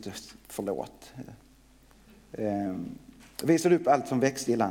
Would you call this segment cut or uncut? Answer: uncut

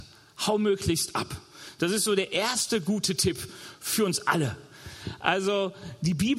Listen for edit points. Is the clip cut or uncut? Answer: uncut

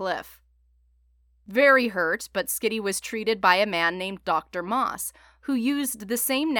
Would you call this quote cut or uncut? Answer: uncut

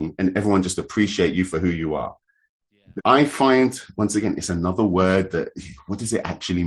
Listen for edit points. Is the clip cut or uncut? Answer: cut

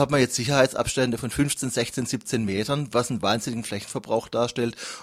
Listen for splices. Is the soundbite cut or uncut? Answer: uncut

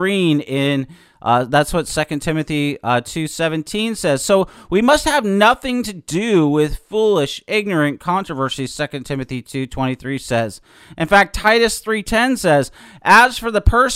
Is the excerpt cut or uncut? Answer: uncut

